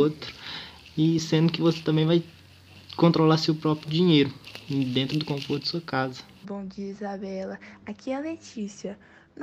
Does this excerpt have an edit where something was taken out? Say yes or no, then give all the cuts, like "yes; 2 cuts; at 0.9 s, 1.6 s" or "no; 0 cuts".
yes; 1 cut; at 6.4 s